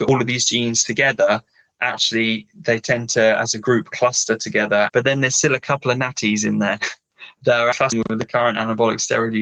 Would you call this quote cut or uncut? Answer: cut